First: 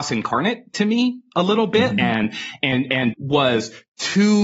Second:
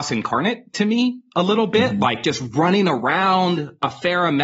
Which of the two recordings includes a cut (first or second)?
first